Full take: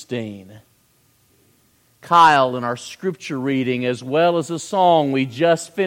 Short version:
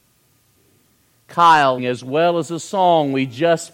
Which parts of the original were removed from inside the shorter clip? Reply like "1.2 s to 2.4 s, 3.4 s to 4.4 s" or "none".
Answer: 2.5 s to 3.8 s